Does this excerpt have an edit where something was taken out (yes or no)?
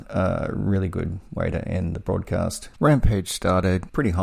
yes